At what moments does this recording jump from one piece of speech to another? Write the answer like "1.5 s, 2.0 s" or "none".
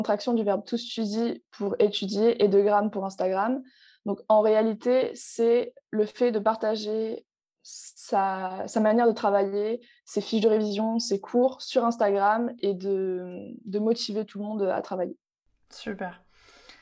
none